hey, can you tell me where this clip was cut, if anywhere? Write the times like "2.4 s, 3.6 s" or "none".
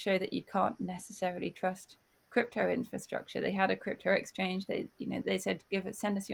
5.2 s